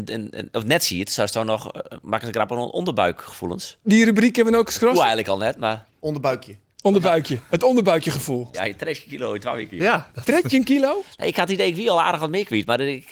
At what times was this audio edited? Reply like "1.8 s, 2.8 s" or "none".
8.5 s

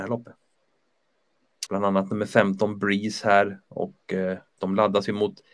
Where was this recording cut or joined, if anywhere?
1.7 s

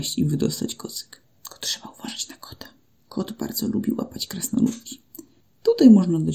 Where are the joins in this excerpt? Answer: none

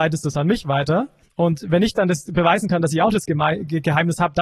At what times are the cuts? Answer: none

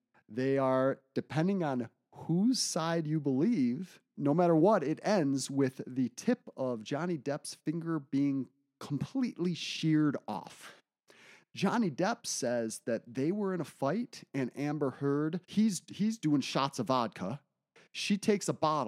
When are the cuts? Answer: 4.1 s, 15.4 s

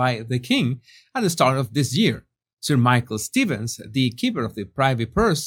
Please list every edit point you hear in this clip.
none

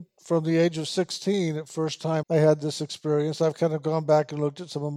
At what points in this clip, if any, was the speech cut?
2.2 s

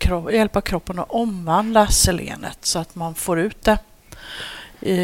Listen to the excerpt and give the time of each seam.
none

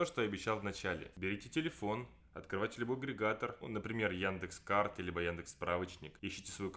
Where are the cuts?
3.6 s

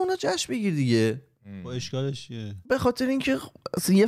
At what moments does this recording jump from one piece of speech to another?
2.7 s

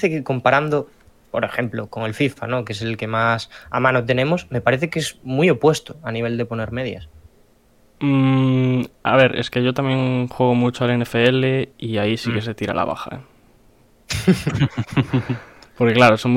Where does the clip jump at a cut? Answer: 1.9 s

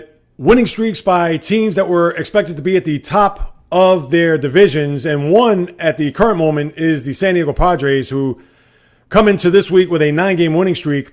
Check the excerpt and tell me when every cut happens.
none

